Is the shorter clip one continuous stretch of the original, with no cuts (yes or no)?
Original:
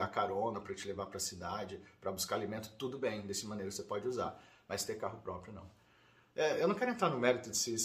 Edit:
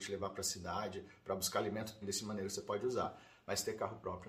no